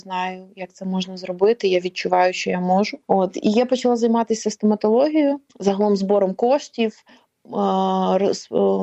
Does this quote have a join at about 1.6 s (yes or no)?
no